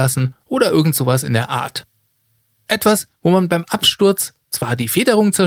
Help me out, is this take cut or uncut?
uncut